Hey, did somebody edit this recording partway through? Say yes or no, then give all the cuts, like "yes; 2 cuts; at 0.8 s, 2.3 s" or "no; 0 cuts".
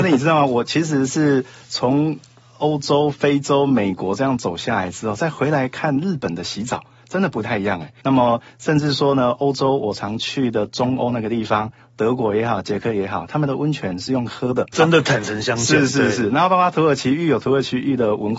yes; 2 cuts; at 8.0 s, 14.7 s